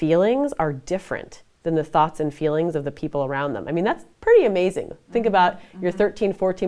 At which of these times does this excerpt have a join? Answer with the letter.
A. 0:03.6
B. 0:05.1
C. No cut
C